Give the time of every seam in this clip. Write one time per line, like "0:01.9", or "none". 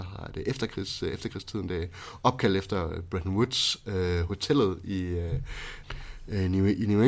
none